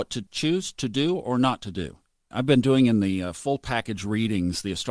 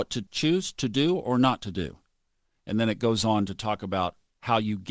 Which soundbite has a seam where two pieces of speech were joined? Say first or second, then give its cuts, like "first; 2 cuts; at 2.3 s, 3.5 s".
first; 1 cut; at 2.3 s